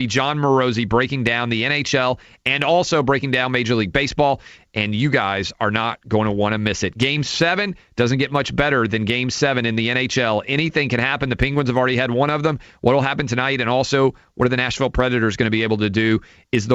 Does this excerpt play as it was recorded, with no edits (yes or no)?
yes